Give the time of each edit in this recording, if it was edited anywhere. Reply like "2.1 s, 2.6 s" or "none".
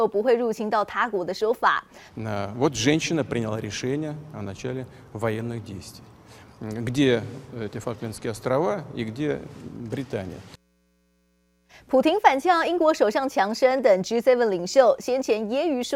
2.1 s